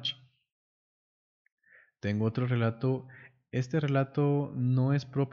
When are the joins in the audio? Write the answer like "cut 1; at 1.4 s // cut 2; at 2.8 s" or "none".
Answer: none